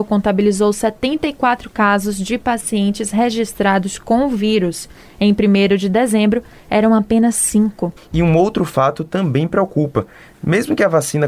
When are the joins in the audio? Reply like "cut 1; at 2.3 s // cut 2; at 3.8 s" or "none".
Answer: cut 1; at 8.0 s